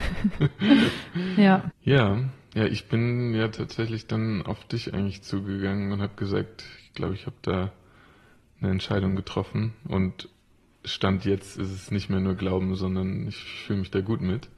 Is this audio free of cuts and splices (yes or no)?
no